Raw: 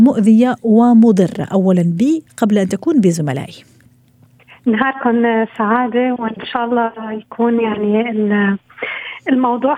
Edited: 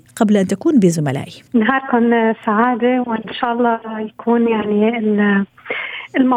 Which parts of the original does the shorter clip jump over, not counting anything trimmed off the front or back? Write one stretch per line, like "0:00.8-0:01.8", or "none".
0:03.7-0:04.6

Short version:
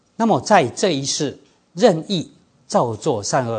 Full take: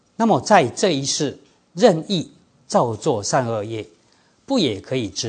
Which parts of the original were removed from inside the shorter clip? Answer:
none

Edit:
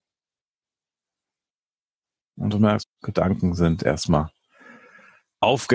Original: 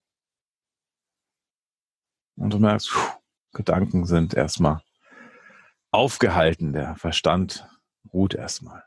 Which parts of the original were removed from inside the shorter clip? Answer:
0:02.8-0:03.3

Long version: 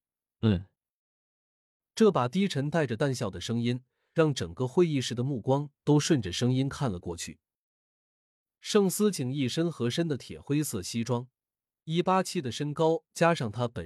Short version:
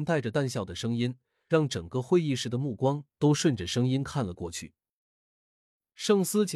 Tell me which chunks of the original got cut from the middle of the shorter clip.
none

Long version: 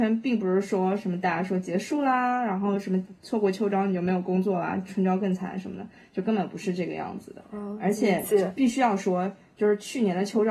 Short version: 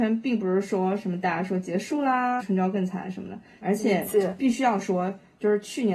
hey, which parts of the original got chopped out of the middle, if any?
0:02.4-0:04.9
0:06.1-0:07.8

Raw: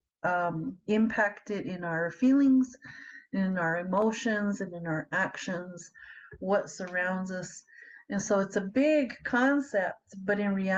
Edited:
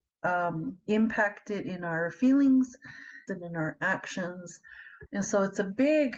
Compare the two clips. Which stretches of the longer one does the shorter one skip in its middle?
0:03.3-0:04.6
0:06.4-0:08.0

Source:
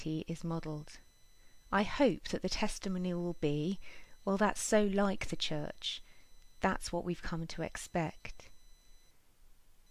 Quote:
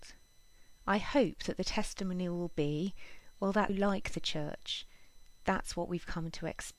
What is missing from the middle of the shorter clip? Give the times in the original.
0:04.5-0:04.9

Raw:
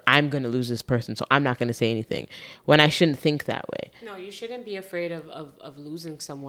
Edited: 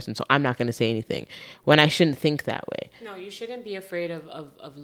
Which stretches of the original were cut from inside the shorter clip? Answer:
none

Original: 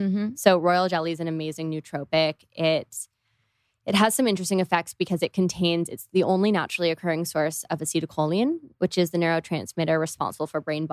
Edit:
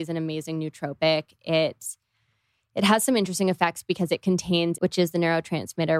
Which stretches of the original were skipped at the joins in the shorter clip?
0:05.9-0:08.8

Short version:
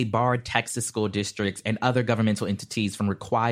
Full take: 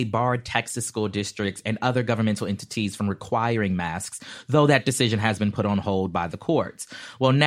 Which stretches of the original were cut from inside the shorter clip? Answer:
none

